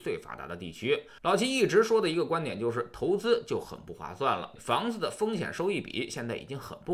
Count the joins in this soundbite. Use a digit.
2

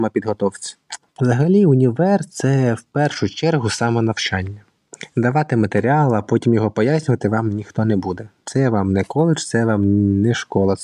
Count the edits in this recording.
1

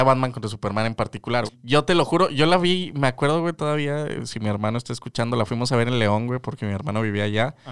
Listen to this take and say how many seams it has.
1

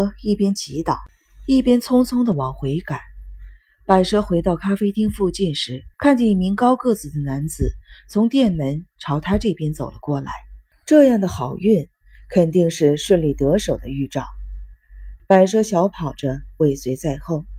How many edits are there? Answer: 3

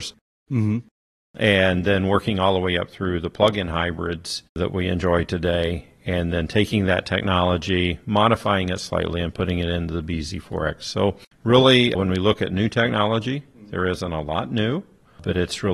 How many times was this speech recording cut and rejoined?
1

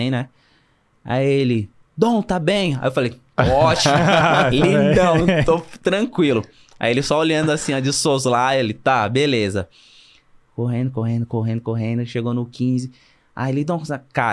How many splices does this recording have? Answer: 0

